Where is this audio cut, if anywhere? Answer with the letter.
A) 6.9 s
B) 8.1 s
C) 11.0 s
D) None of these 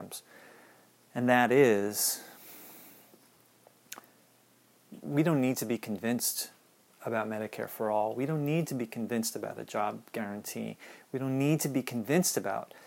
D